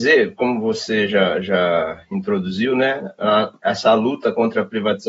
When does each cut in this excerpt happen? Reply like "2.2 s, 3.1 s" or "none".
none